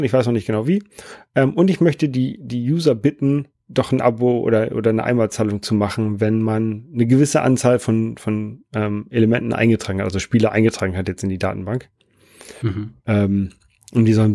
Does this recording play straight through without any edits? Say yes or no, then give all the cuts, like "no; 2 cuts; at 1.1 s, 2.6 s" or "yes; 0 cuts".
yes; 0 cuts